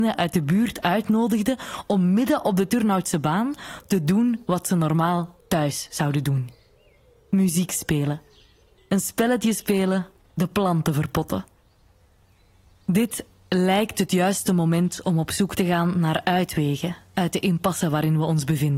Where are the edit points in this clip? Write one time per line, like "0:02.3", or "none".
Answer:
0:08.8